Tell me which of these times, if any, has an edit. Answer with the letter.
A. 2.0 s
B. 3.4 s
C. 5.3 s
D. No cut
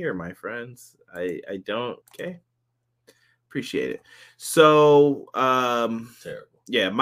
A